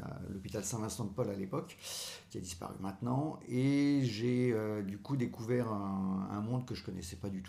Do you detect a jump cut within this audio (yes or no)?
no